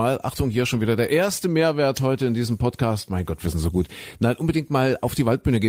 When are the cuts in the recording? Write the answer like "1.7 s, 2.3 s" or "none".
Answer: none